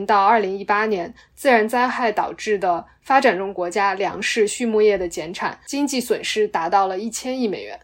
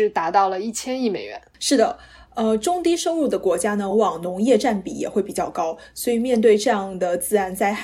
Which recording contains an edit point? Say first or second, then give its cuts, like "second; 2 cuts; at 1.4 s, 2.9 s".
second; 1 cut; at 3.9 s